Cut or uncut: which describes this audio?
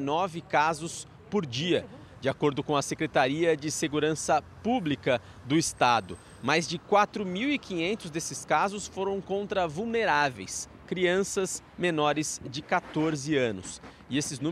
uncut